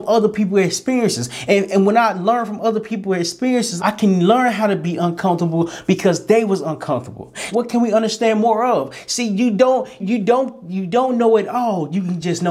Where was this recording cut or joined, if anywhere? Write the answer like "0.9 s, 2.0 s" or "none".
3.8 s, 7.5 s, 10.0 s